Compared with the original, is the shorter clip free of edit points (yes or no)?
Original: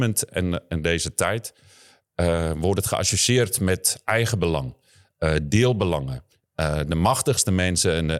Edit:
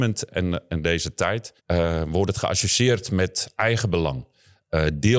no